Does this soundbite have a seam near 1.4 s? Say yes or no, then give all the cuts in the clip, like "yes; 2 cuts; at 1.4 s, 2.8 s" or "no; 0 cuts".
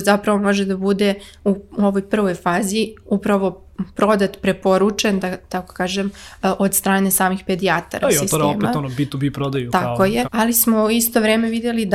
no; 2 cuts; at 8.0 s, 10.2 s